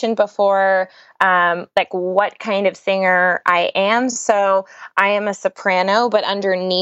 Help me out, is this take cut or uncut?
uncut